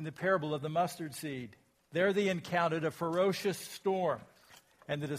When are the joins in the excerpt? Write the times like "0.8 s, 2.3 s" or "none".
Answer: 1.8 s